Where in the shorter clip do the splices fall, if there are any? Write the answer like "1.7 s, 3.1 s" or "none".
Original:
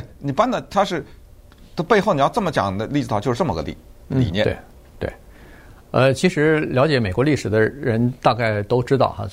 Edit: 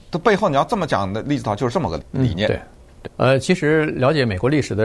2.0 s, 3.0 s